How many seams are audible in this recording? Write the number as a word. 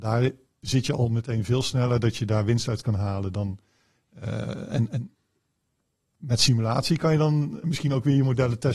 one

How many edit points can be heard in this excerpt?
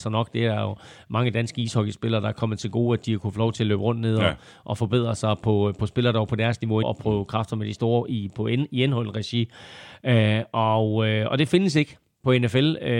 one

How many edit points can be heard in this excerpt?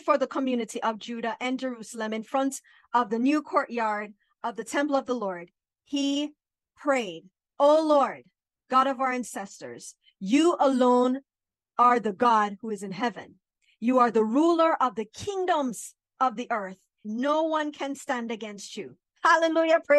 one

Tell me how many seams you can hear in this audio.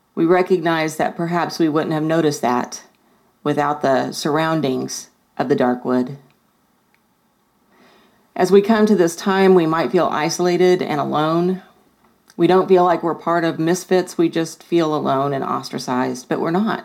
zero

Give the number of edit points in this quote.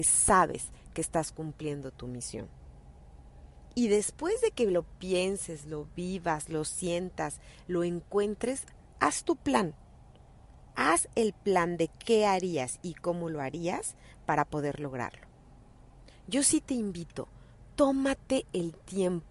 zero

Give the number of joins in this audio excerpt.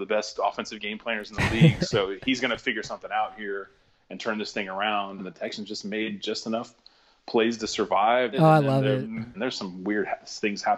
three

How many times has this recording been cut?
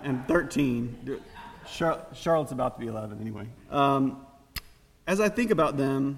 two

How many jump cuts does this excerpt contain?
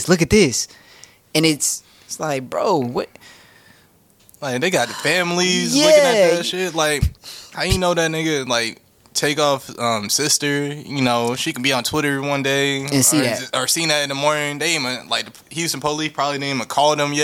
zero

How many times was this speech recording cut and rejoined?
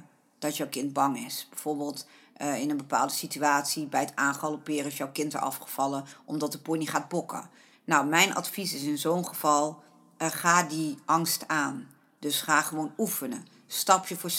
one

